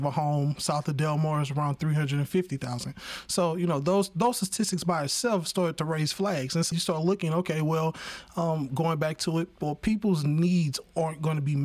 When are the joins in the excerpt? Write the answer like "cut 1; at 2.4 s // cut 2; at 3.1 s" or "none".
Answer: cut 1; at 6.7 s